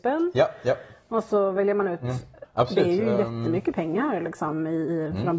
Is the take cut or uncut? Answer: cut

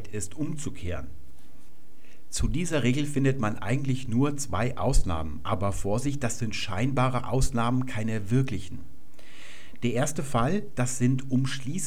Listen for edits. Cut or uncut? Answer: uncut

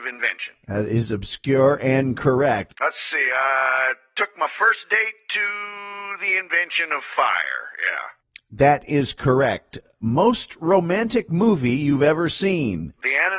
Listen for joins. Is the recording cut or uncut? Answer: cut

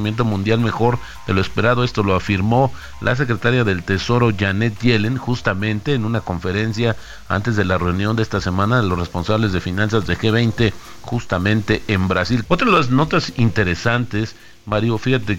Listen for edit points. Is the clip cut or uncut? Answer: cut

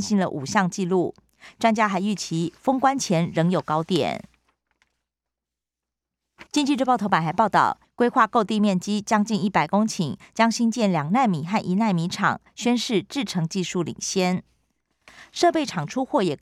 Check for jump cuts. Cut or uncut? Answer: cut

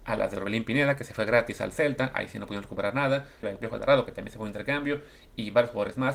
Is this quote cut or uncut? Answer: cut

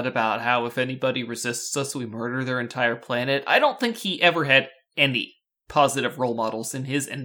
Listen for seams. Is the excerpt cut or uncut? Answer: uncut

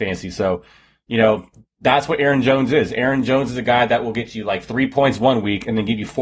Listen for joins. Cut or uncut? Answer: uncut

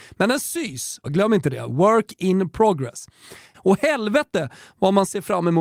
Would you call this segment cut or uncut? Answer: cut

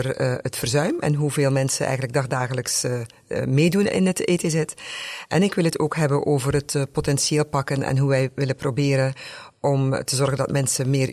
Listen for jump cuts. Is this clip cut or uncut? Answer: uncut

